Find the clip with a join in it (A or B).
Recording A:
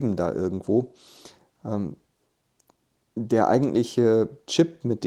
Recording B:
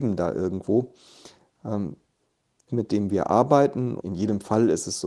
B